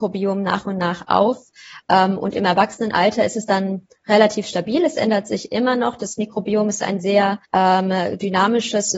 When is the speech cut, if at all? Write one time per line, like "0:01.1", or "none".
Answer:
0:07.4